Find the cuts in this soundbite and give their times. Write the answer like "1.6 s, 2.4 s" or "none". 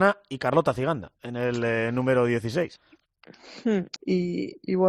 4.0 s